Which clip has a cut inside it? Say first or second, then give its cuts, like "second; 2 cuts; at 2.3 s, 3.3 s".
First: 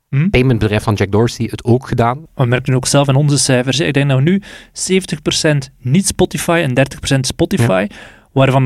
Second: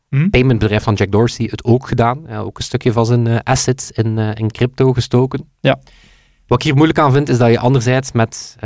first; 1 cut; at 2.3 s